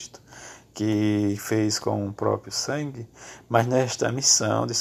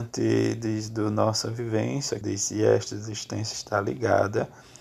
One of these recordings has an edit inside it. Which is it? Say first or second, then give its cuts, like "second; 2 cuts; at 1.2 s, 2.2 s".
second; 1 cut; at 2.2 s